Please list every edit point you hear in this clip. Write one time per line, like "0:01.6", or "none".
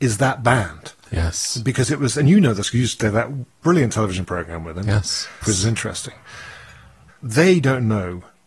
0:05.4
0:07.1